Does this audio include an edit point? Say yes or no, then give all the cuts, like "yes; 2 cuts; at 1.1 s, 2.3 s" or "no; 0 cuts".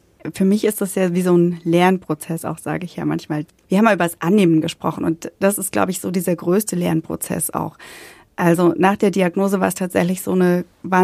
no; 0 cuts